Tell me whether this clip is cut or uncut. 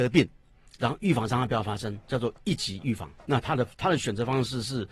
cut